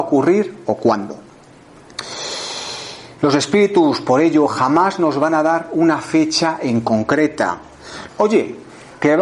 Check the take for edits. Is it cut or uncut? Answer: cut